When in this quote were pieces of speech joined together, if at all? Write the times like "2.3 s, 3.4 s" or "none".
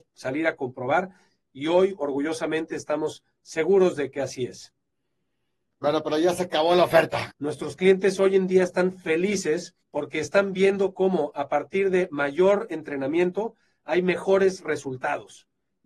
7.3 s, 9.8 s